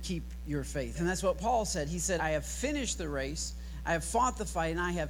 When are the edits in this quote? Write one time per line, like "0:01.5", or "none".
0:01.0
0:02.2